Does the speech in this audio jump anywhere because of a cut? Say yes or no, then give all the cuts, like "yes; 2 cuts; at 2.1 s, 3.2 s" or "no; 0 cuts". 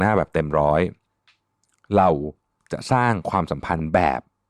no; 0 cuts